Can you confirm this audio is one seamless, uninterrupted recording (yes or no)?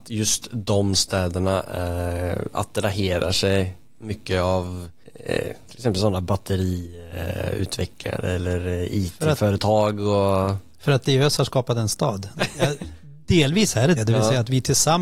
no